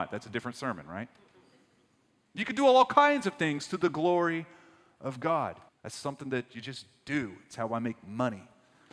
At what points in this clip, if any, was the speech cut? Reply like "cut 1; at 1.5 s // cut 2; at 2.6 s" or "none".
cut 1; at 5.7 s